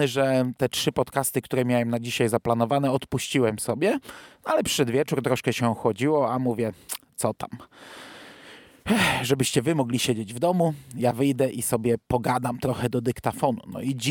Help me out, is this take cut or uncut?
uncut